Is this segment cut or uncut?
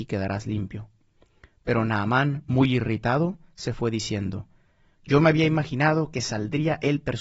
uncut